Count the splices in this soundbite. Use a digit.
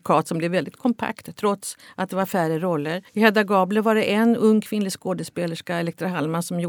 1